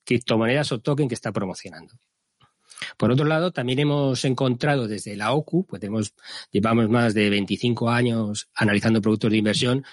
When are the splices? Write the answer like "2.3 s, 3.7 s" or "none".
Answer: none